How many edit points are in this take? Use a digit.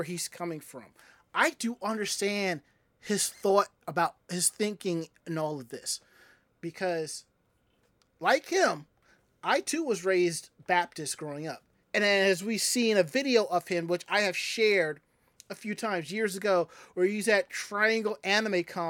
1